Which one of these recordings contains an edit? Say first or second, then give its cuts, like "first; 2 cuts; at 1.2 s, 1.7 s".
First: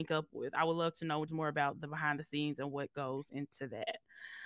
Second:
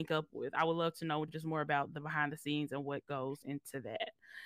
first; 1 cut; at 1.3 s